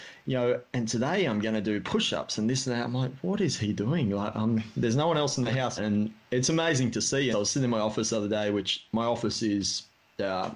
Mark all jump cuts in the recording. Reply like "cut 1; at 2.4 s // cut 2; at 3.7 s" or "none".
cut 1; at 5.8 s // cut 2; at 7.3 s